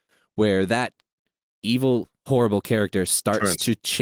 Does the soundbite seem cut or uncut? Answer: uncut